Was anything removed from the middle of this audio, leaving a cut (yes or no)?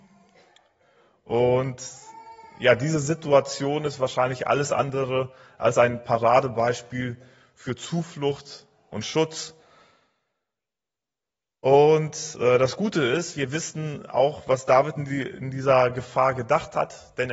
no